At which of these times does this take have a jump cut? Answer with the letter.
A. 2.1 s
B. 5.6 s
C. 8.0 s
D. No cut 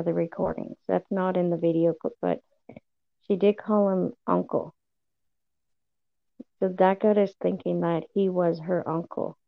A